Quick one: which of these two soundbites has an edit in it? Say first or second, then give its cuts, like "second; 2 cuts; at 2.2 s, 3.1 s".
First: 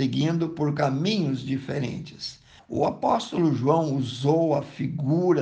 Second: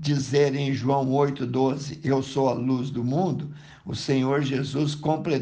first; 1 cut; at 2.6 s